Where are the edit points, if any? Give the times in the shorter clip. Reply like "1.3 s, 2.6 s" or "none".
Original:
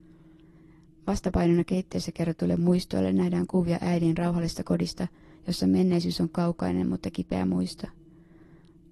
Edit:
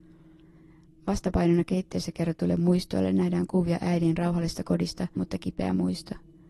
5.2 s